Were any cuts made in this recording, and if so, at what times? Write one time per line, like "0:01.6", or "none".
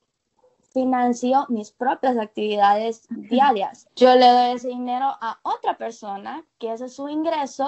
0:03.9

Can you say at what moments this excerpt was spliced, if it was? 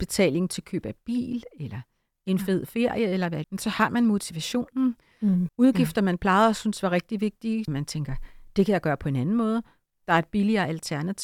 0:03.4
0:05.5
0:07.7

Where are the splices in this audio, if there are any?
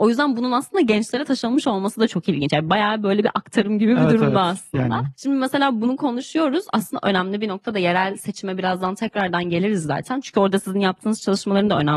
none

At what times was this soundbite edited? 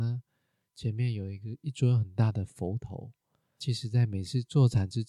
none

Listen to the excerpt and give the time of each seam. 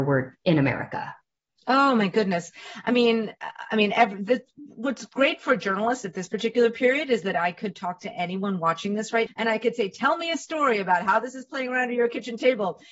0:09.3

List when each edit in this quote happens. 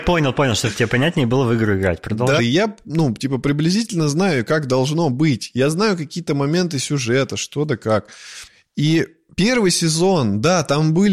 0:02.4

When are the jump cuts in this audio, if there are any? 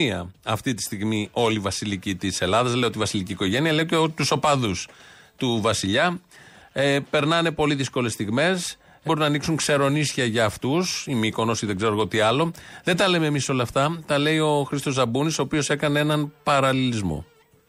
0:09.1

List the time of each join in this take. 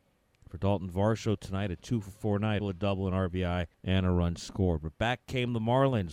0:02.6
0:03.7

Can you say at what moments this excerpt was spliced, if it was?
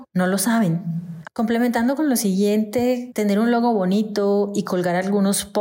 0:01.2

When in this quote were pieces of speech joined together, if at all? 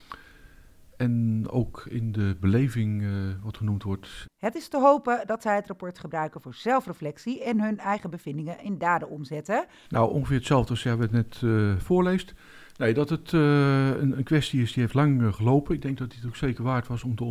0:04.2
0:09.8

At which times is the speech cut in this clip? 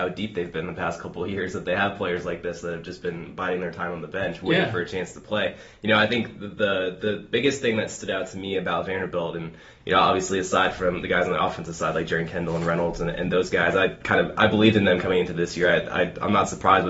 none

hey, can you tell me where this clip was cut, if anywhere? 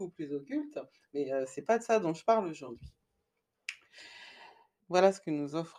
0:04.8

